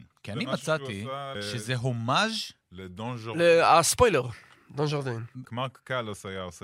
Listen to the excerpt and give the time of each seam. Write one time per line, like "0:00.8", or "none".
0:01.4
0:05.5